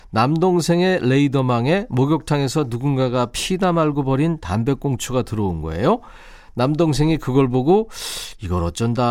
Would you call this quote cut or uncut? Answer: uncut